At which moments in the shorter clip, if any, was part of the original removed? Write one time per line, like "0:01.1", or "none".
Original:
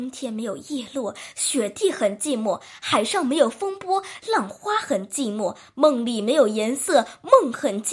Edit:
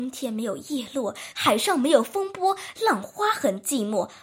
0:01.3